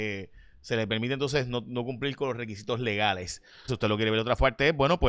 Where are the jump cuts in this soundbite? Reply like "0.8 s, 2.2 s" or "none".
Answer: 3.7 s